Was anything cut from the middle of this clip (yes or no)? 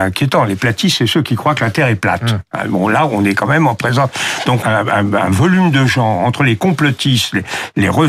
yes